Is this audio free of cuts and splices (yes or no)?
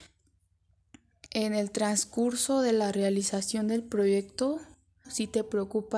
no